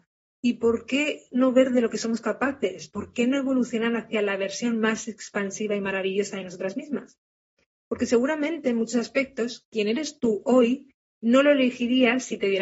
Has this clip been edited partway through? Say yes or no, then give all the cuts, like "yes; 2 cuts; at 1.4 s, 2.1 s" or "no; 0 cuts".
yes; 1 cut; at 2.9 s